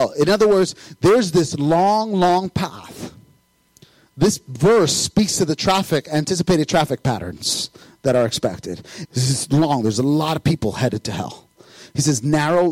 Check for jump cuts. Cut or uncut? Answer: cut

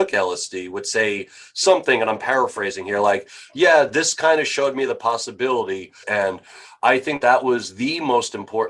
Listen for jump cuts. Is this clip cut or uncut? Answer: cut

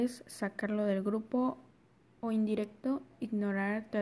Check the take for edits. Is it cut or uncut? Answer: uncut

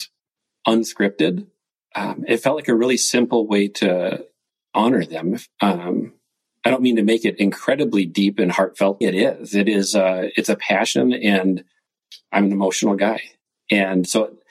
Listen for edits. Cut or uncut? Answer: cut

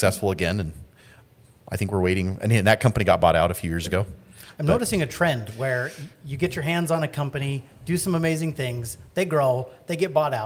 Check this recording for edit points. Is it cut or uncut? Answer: uncut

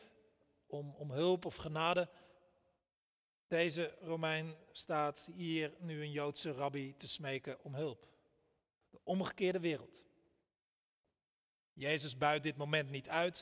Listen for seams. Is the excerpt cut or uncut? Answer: uncut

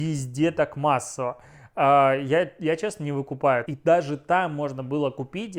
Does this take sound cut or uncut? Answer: cut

